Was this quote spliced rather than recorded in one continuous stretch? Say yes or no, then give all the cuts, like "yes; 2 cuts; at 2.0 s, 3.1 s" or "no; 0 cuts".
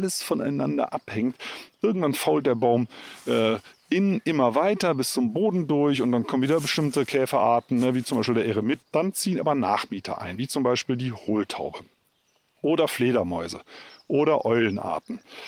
yes; 1 cut; at 8.8 s